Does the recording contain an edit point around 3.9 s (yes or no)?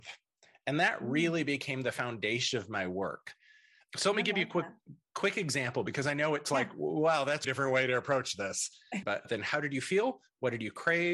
no